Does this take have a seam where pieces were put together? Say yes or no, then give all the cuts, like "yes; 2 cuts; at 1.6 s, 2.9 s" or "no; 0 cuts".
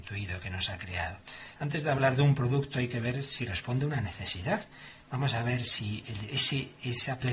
yes; 1 cut; at 1.5 s